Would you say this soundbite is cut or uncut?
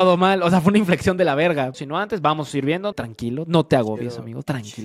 cut